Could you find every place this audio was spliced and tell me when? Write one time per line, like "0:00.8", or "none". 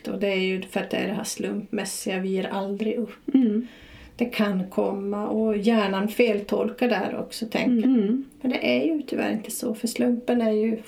0:07.8

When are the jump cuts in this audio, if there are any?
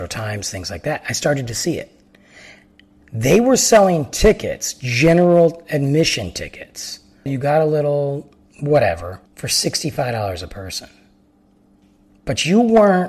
0:07.3
0:09.3

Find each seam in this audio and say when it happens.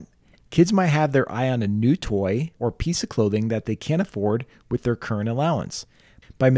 0:02.6

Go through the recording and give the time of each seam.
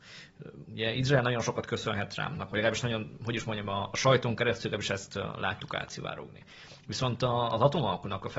none

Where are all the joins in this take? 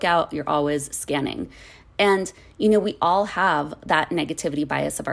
none

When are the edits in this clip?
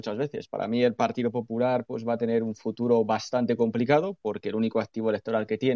none

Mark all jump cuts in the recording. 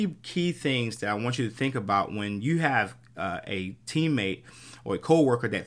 none

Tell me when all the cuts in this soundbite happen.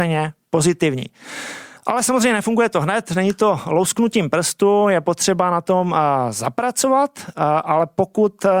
none

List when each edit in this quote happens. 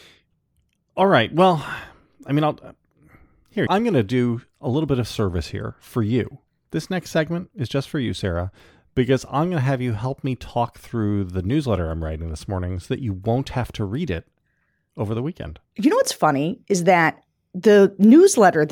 0:03.7

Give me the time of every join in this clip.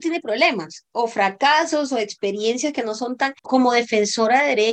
0:03.4

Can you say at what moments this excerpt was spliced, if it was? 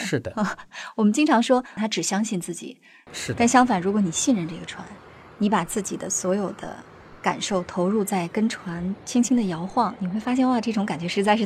0:01.8
0:03.1

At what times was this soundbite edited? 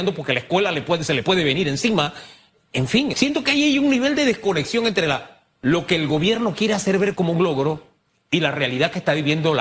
0:03.1

